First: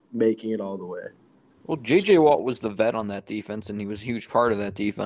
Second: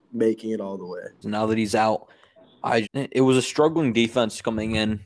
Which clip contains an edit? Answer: second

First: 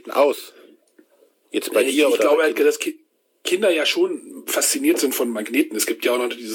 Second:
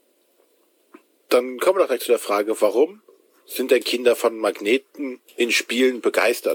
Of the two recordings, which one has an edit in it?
second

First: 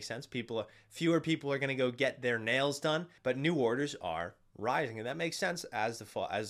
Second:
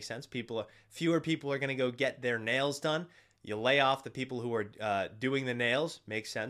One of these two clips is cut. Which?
first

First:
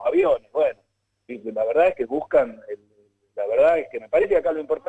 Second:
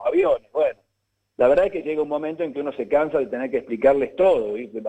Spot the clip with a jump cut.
first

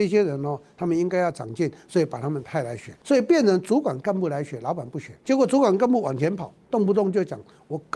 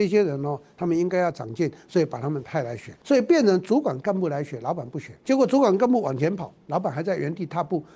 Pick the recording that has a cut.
first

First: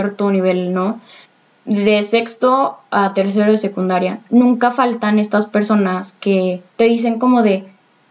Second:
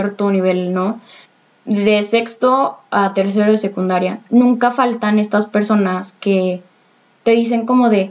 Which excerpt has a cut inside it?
first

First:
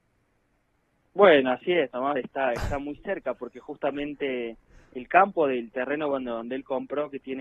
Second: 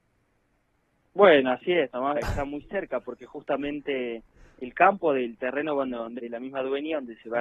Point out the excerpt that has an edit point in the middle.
second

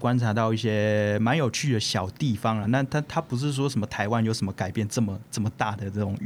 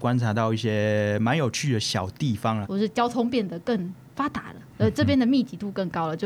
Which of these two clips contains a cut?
second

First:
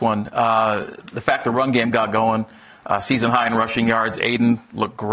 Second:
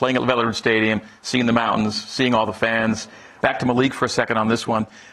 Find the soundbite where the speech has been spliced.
second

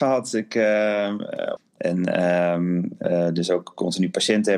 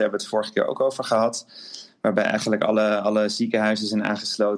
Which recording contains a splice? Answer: first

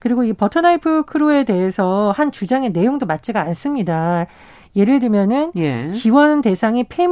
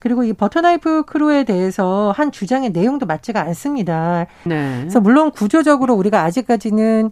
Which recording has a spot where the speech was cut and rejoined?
second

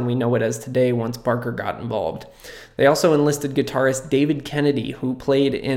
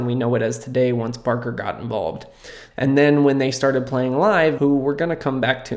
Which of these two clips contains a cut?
second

